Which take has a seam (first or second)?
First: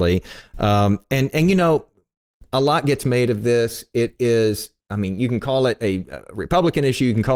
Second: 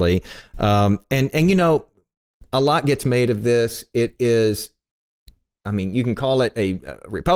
first